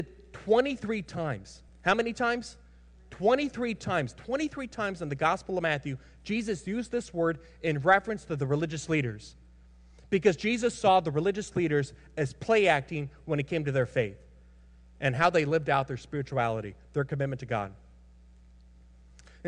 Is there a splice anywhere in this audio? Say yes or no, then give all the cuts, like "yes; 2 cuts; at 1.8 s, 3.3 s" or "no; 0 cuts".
no; 0 cuts